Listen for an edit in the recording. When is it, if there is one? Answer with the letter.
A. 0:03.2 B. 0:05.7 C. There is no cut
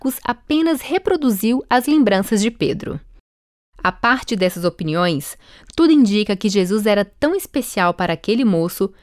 C